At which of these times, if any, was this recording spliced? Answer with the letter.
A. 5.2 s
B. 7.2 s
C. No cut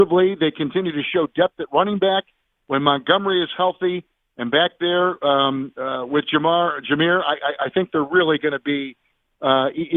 C